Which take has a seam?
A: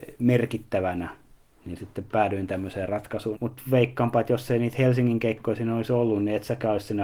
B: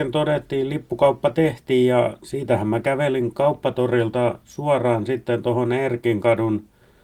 A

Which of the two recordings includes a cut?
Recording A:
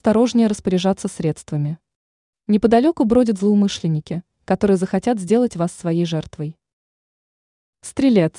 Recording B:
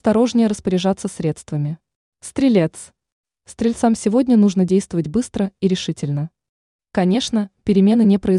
B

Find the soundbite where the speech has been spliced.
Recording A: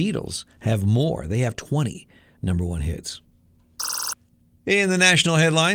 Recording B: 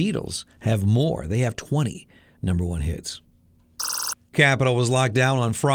B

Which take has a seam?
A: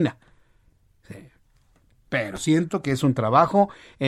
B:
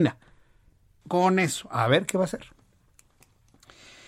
B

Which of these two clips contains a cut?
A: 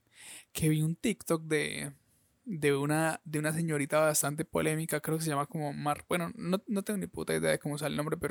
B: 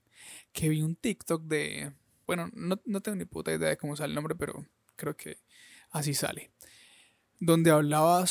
B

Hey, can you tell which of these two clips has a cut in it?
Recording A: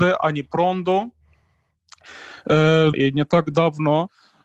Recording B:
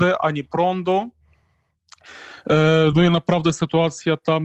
A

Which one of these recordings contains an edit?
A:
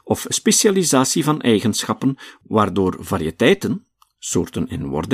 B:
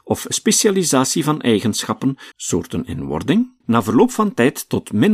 B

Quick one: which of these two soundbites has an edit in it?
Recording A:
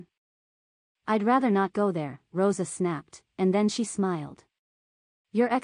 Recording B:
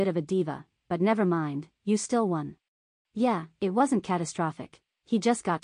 B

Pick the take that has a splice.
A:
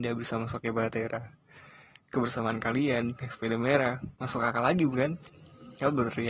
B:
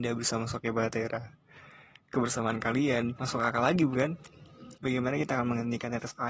B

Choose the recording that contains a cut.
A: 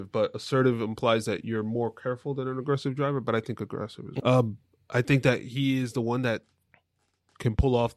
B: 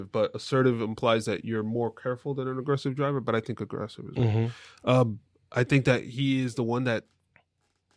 A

